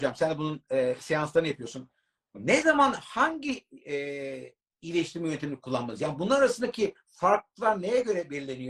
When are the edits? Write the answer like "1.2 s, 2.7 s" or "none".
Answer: none